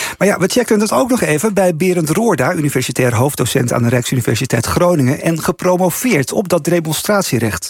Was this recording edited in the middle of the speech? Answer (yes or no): no